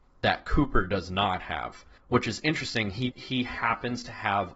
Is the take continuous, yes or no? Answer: no